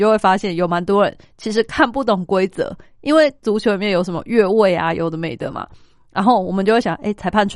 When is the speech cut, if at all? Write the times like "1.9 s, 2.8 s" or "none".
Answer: none